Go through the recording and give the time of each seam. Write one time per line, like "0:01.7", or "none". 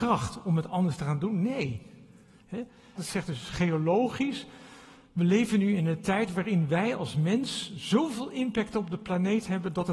0:03.0